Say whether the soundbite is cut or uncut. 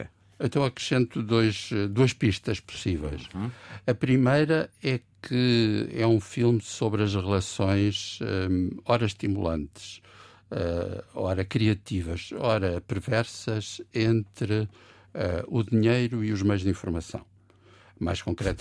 uncut